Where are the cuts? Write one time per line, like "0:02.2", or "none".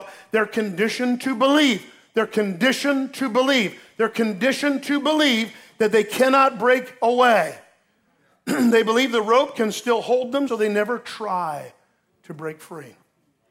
0:10.5

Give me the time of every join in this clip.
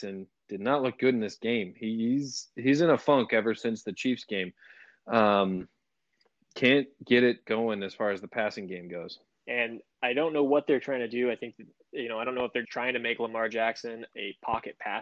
0:09.3
0:12.6

